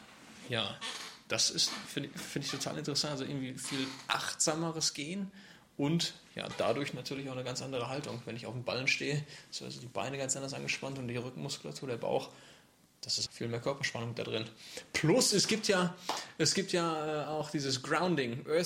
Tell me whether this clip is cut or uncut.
cut